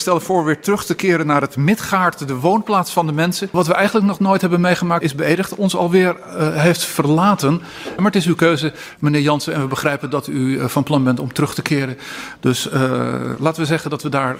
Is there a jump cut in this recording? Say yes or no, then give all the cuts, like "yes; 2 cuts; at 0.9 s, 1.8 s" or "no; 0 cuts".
yes; 2 cuts; at 5.0 s, 8.0 s